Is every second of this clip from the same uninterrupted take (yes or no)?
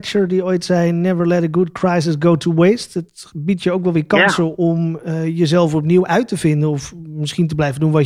yes